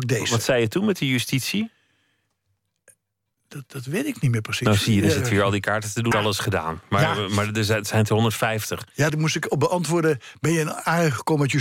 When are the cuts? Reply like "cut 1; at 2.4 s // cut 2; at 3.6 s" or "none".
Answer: cut 1; at 6.1 s // cut 2; at 9.1 s